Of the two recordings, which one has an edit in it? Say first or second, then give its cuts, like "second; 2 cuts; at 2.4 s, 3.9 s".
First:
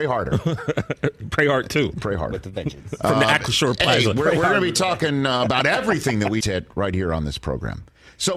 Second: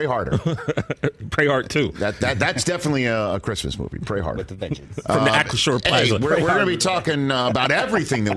first; 2 cuts; at 1.9 s, 6.4 s